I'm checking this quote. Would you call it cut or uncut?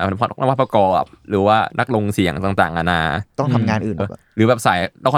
cut